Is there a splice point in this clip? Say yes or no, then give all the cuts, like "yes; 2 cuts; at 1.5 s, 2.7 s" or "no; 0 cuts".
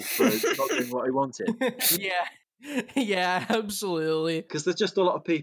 yes; 2 cuts; at 2.0 s, 4.5 s